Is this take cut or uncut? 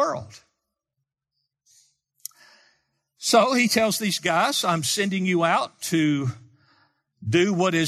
uncut